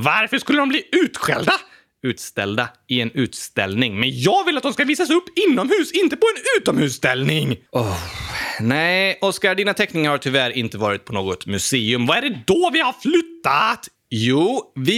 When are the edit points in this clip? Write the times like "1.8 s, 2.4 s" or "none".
7.7 s